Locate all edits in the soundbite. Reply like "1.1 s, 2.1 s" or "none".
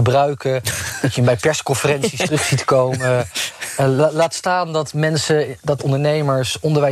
5.8 s